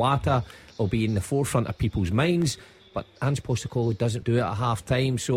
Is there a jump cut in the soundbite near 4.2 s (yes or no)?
yes